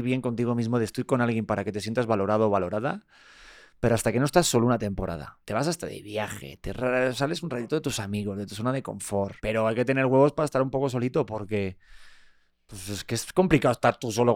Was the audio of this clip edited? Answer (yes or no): yes